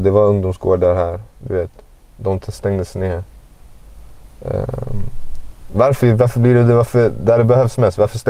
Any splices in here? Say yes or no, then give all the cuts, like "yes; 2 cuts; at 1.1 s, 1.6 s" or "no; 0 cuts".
no; 0 cuts